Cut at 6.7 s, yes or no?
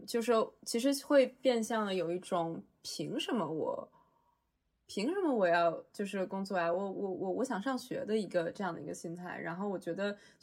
no